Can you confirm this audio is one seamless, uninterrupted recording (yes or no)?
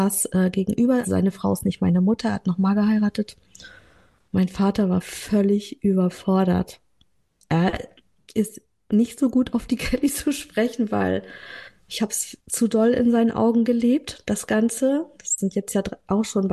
no